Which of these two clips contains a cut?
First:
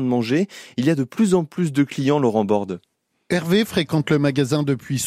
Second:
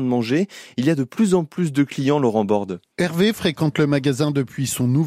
second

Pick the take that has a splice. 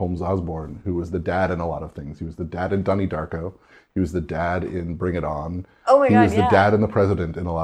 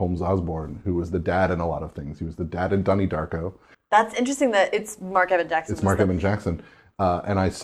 second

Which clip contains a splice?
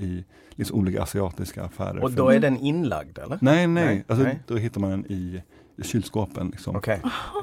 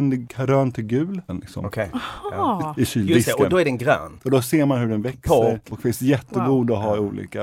second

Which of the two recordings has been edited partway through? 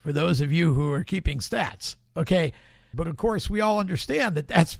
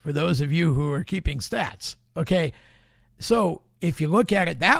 first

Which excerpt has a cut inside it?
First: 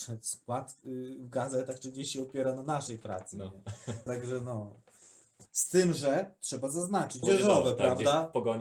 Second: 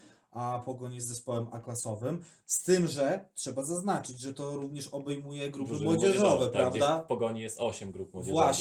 first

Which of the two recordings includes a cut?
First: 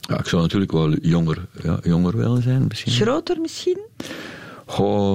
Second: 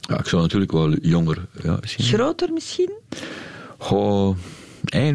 second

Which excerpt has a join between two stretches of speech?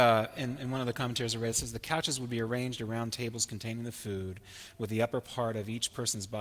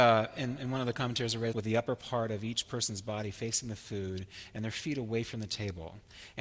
second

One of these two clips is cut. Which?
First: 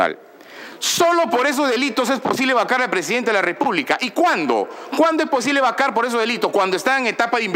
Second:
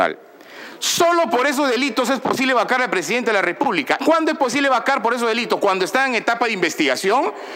second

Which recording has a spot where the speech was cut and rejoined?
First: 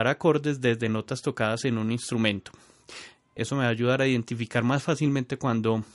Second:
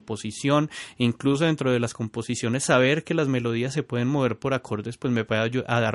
first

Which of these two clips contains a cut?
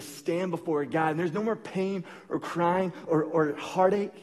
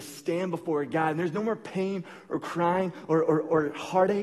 first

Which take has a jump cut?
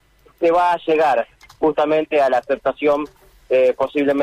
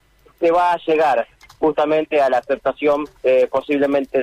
second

